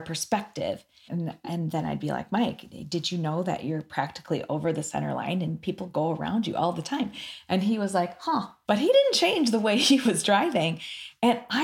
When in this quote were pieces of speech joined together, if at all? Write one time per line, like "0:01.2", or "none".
0:01.1
0:08.6